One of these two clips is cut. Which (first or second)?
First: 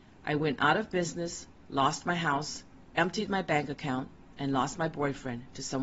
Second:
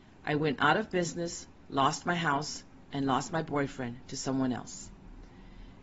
second